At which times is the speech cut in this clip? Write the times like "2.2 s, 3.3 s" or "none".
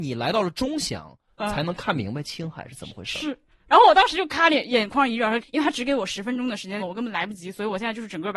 3.7 s, 5.4 s, 6.8 s

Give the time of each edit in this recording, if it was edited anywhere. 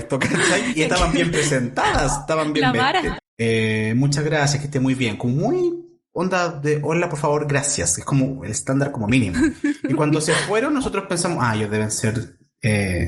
3.2 s

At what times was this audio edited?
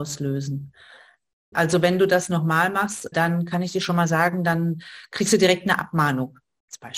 1.5 s, 3.1 s

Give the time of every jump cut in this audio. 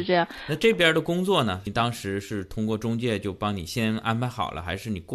none

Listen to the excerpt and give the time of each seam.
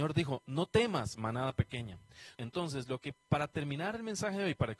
2.3 s

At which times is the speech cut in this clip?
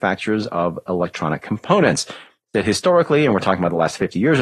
none

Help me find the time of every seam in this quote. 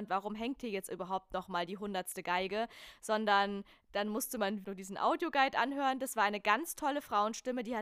4.6 s

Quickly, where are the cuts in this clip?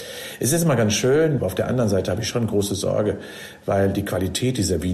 1.4 s

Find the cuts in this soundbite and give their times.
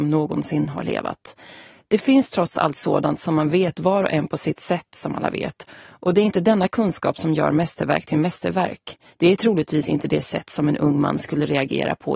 9.1 s

